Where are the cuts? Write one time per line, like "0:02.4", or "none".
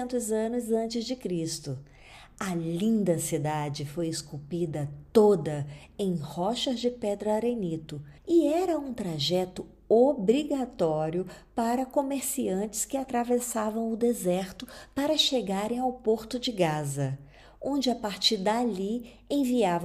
0:08.2